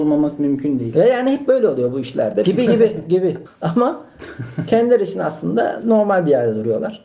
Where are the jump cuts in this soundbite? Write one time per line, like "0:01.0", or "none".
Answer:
0:02.4
0:03.5